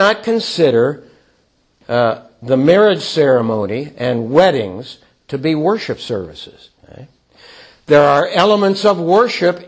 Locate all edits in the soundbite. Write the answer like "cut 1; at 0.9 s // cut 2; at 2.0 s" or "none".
cut 1; at 6.8 s